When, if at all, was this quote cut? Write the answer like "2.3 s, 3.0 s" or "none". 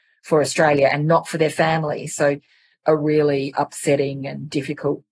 2.1 s